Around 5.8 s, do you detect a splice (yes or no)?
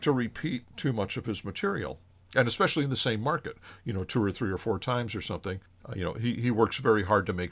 yes